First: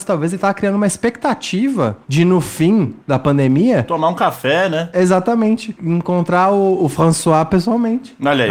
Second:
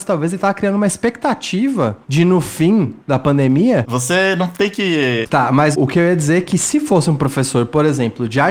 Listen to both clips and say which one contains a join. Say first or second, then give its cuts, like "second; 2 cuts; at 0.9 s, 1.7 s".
second; 2 cuts; at 3.8 s, 5.2 s